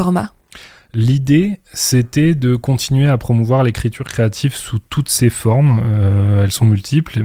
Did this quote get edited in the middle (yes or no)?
no